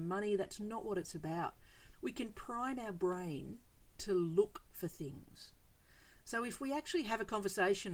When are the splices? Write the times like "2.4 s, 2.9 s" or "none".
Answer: 1.9 s